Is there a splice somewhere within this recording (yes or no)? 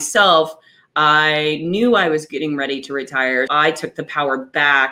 yes